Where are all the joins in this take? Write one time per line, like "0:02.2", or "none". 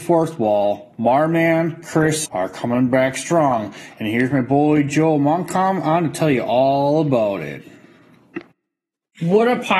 0:02.3